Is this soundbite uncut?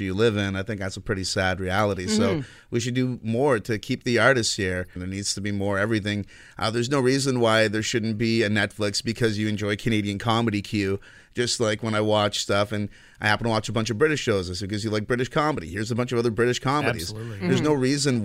no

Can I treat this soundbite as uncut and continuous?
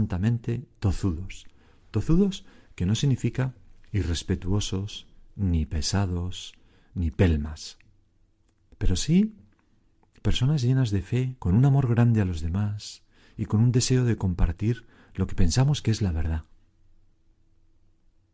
no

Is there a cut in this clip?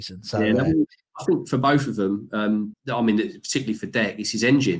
yes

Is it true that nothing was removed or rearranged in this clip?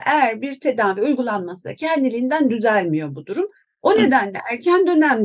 no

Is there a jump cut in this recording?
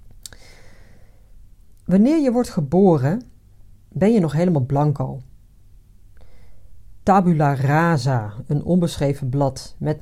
no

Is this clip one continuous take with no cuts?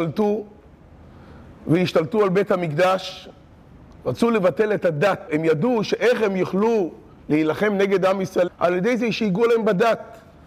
no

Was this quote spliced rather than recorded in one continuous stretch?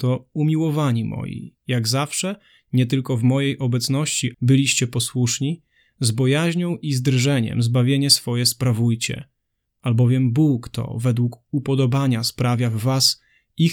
yes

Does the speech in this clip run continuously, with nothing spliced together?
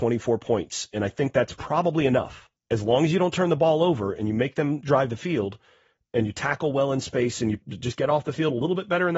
no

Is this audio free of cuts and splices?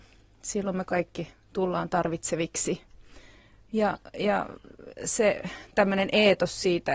yes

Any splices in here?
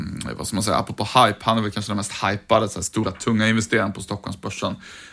no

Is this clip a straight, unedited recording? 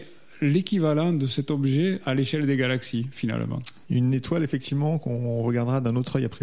no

